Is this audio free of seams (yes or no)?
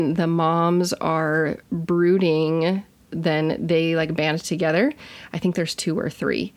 no